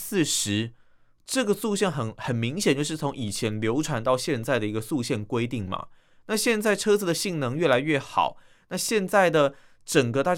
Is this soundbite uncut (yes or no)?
yes